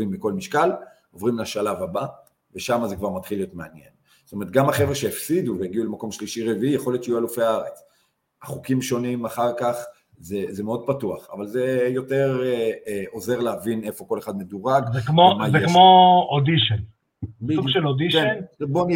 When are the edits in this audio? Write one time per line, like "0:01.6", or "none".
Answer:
none